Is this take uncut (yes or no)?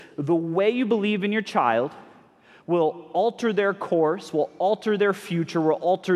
yes